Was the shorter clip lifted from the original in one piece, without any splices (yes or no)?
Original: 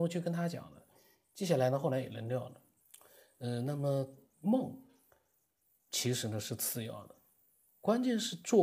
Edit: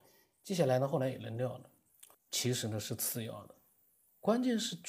no